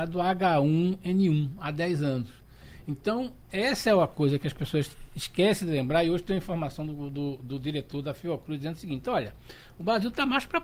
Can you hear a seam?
no; 0 cuts

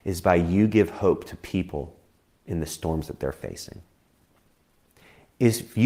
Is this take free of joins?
yes; 0 cuts

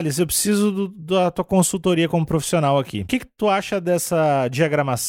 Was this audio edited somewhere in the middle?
no; 0 cuts

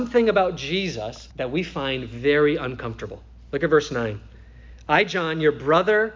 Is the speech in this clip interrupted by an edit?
yes; 1 cut; at 1.3 s

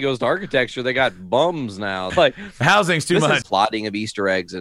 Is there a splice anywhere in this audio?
yes; 2 cuts; at 2.1 s, 3.4 s

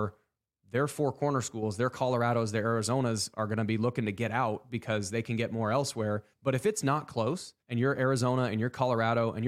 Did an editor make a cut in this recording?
yes; 2 cuts; at 6.3 s, 7.6 s

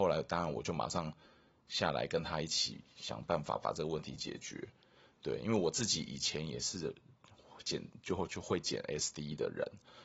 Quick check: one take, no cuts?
yes; 0 cuts

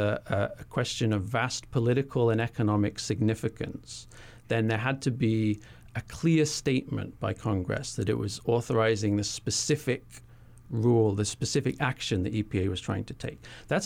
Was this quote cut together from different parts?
no; 0 cuts

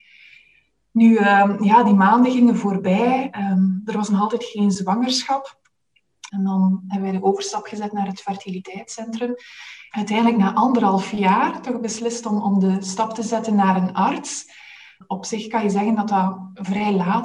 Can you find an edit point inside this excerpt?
yes; 2 cuts; at 6.3 s, 9.9 s

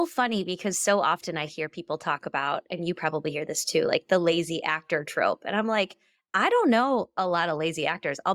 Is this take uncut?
yes; 0 cuts

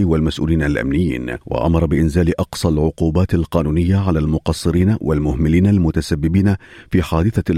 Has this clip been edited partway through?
yes; 1 cut; at 1.4 s

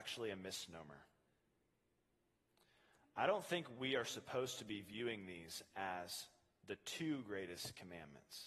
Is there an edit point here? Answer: no; 0 cuts

